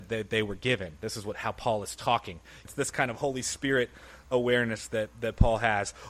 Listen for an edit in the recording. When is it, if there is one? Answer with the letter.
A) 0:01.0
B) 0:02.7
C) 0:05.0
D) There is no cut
B